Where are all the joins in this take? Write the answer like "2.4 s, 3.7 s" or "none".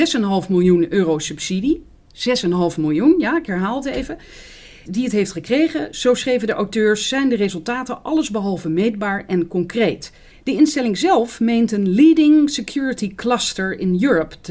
4.9 s, 10.3 s

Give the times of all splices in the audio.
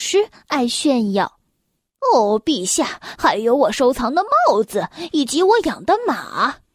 3.2 s

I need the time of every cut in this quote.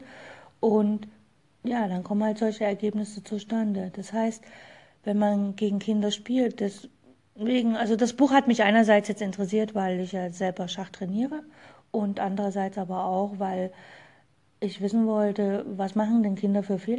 none

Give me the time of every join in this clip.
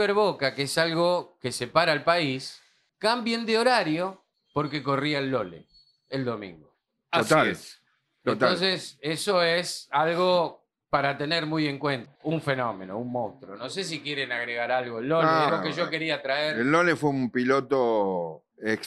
12.1 s, 15.5 s

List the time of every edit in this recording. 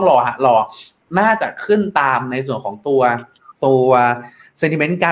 3.6 s

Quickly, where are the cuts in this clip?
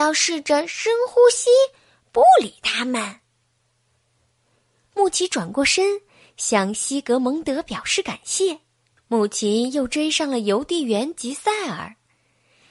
8.9 s

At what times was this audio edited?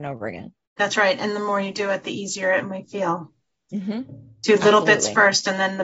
none

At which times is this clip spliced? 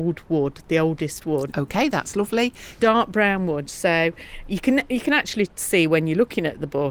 1.5 s, 2.8 s

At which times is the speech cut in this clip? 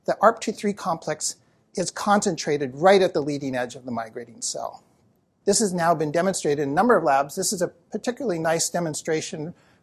5.4 s

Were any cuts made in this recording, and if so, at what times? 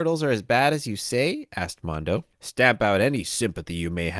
2.3 s

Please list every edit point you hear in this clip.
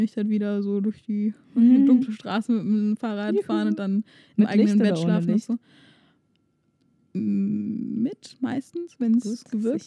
none

